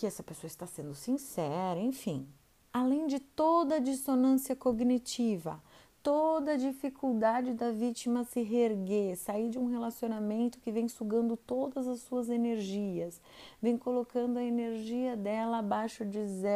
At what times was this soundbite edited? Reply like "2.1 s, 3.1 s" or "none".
2.7 s